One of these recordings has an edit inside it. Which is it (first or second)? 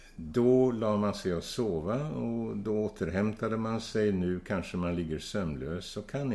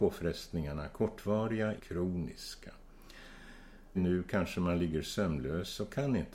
second